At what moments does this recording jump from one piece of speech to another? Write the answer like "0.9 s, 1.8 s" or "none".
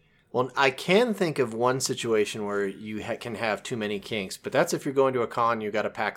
none